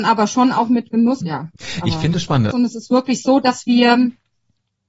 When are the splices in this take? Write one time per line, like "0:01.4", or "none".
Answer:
0:01.2
0:02.5